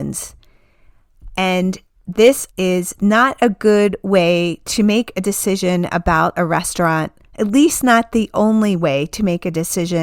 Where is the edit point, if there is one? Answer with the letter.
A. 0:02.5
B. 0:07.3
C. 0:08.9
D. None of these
A